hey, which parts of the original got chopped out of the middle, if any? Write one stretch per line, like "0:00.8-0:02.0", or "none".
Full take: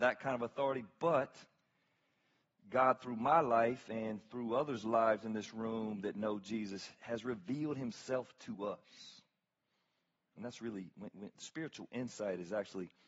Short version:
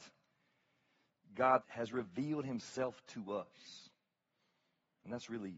0:03.0-0:07.0

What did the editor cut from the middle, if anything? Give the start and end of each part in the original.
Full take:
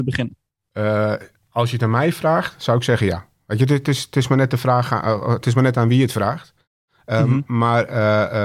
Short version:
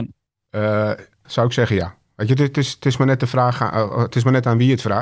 0:01.5-0:02.6

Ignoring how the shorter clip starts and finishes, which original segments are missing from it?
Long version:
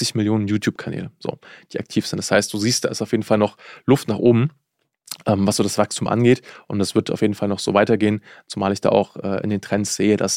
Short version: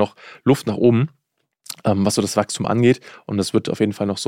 none

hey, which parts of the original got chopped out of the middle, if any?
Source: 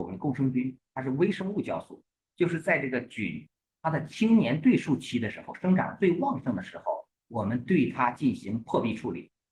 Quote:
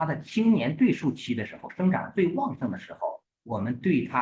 none

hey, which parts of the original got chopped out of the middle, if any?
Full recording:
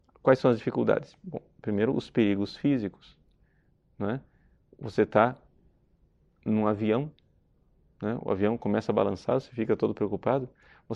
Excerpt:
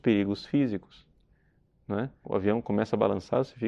0:04.3-0:08.2

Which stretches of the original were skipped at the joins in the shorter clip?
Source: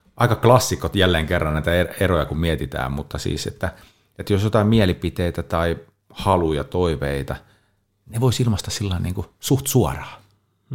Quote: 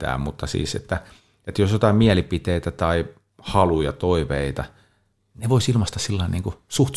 none

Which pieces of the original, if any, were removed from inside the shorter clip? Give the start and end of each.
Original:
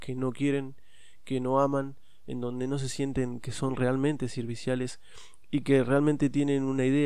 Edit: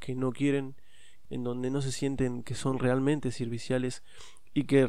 0:01.2-0:02.2

